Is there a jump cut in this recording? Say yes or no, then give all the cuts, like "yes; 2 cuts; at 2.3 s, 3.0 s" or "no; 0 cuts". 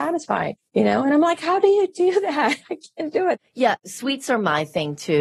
no; 0 cuts